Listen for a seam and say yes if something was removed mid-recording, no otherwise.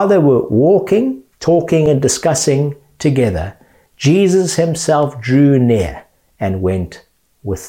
yes